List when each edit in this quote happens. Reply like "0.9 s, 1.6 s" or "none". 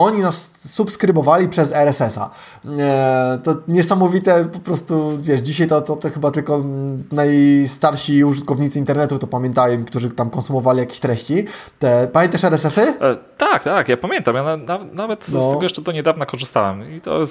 none